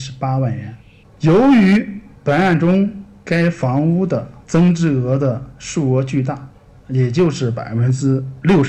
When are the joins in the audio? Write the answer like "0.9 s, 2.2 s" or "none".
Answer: 1.0 s, 6.7 s